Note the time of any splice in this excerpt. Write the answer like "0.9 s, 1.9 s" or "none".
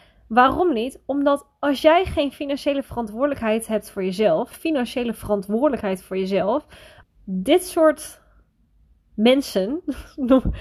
4.5 s, 7.0 s